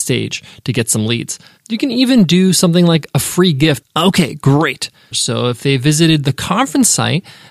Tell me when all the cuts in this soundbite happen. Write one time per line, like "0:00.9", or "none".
0:03.8
0:05.1

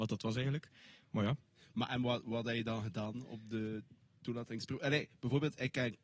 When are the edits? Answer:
none

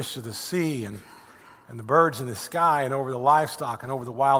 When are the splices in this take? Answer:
none

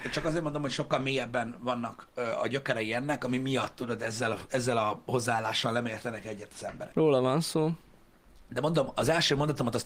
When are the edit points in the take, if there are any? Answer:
0:06.9

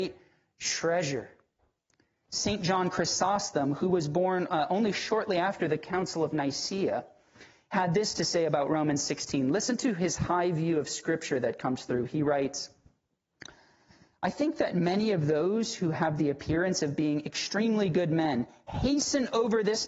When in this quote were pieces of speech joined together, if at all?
0:02.2

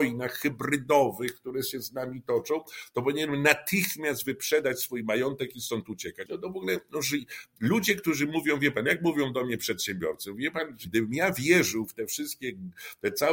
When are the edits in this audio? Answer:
0:06.3
0:10.8

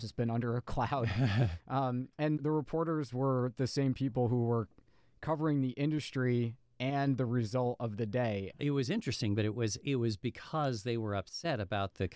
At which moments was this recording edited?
0:02.4
0:08.5

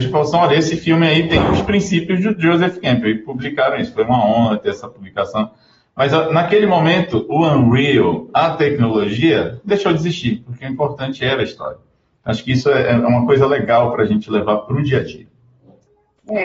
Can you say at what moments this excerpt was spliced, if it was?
none

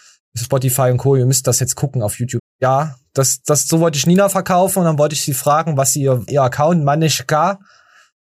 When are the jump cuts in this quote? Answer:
0:02.4
0:03.4
0:06.3

